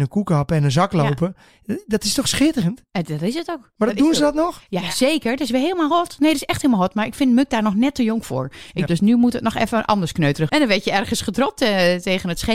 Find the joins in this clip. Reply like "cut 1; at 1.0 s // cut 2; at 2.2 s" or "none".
cut 1; at 8.9 s // cut 2; at 10.5 s